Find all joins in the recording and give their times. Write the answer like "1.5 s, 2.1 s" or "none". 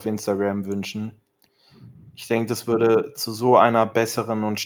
none